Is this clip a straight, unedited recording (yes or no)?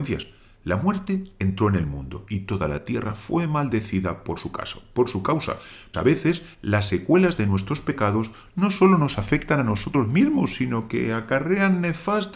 no